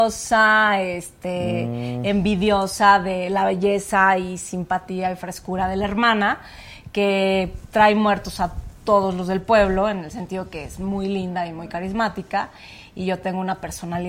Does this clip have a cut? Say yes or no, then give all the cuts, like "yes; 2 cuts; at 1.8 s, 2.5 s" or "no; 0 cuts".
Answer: yes; 1 cut; at 7.6 s